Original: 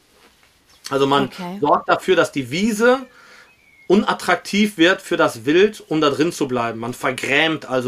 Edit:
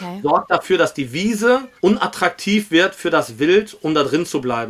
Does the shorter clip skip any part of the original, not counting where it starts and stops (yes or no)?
yes